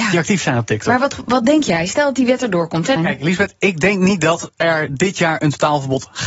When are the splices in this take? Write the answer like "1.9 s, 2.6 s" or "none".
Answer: 3.0 s